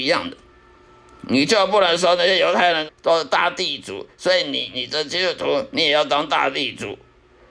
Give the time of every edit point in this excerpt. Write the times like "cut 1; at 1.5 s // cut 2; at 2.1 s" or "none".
cut 1; at 2.9 s